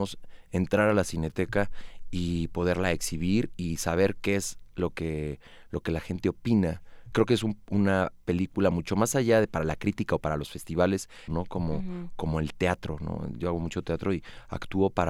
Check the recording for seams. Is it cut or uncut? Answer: cut